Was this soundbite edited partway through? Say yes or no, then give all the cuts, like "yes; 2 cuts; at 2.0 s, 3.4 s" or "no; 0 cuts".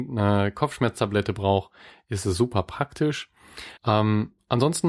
yes; 1 cut; at 3.8 s